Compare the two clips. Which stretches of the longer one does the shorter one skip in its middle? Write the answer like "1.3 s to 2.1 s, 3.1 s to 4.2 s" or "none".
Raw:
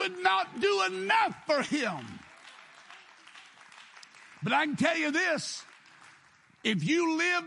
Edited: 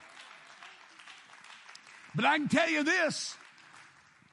none